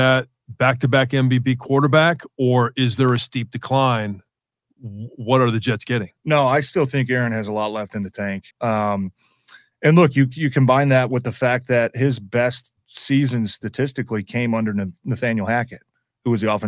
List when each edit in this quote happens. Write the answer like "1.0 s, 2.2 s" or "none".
8.5 s